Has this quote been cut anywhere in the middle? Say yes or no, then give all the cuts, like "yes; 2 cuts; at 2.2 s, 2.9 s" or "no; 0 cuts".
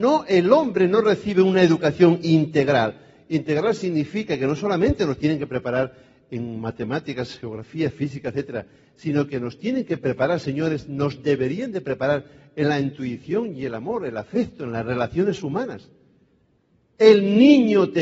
no; 0 cuts